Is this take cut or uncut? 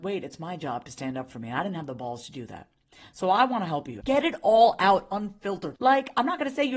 cut